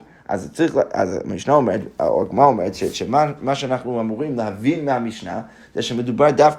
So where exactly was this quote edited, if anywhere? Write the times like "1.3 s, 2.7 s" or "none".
none